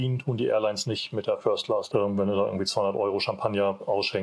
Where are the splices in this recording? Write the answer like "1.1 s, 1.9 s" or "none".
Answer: 1.9 s